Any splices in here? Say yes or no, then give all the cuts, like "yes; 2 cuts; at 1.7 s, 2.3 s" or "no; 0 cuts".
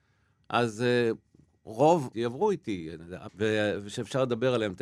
yes; 2 cuts; at 2.1 s, 3.3 s